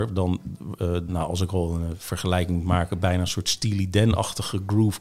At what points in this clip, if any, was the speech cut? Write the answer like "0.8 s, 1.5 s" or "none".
1.1 s